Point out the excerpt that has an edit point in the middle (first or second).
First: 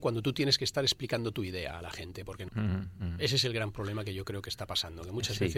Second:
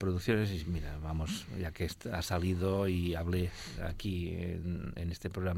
first